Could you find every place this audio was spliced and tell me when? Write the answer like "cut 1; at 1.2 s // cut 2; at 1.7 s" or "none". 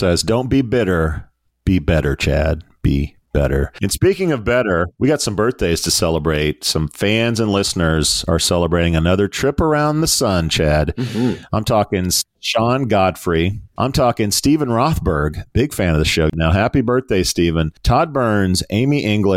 none

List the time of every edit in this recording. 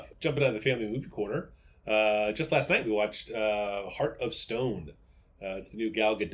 none

